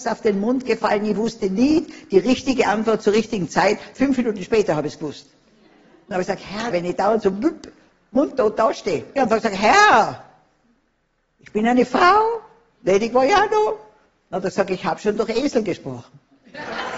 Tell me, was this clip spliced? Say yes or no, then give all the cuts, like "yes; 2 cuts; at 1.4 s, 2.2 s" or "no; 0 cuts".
yes; 2 cuts; at 6.7 s, 9.2 s